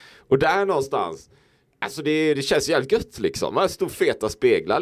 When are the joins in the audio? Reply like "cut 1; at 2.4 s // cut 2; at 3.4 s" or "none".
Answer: cut 1; at 2.4 s